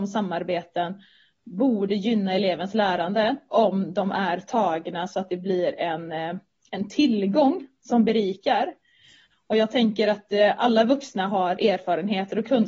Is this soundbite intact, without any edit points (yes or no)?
yes